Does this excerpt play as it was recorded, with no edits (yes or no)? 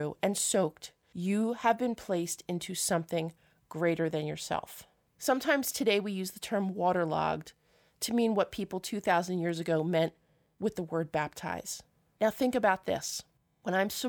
no